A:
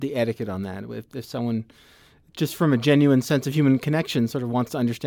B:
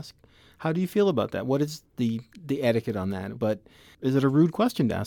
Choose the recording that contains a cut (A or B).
B